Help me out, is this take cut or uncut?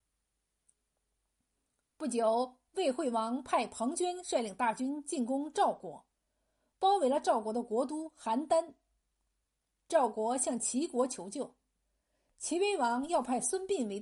uncut